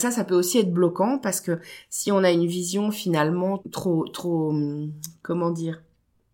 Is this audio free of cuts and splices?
no; 1 cut; at 3.6 s

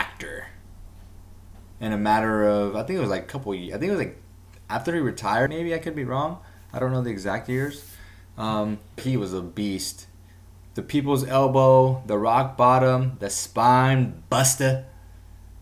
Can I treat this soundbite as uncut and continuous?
no; 2 cuts; at 5.5 s, 9.0 s

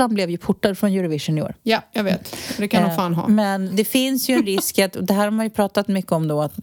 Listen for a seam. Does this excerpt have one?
yes; 1 cut; at 3.7 s

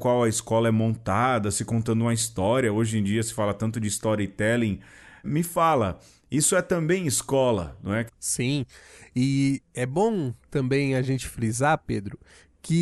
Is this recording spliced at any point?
yes; 2 cuts; at 5.2 s, 8.1 s

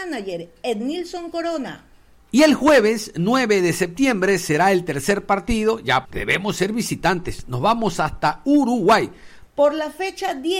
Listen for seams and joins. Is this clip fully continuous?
no; 2 cuts; at 6.1 s, 9.5 s

